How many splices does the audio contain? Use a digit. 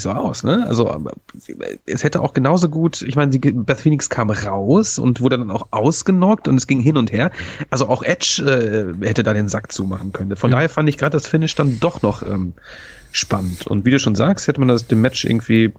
0